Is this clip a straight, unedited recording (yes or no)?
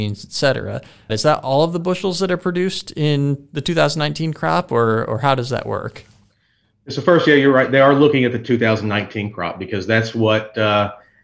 no